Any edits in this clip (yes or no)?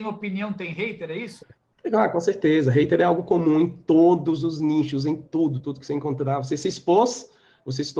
yes